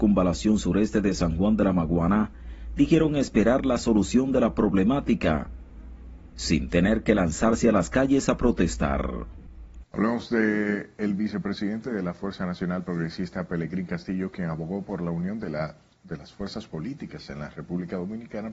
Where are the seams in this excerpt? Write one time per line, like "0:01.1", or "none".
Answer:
0:09.8